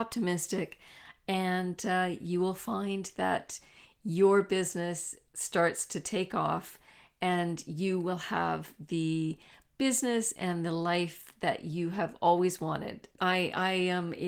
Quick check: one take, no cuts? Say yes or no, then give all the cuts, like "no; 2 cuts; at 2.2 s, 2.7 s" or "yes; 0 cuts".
no; 1 cut; at 13.2 s